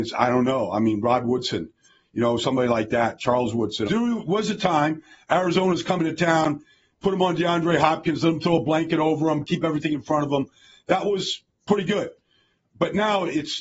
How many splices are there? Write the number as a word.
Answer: one